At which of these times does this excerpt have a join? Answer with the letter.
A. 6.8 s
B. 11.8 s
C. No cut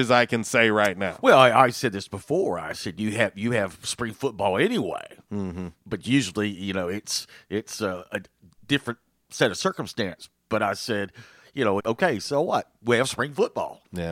B